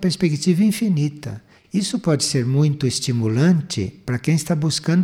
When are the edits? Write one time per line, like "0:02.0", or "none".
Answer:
0:01.6